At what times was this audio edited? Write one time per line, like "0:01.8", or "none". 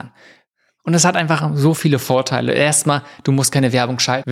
none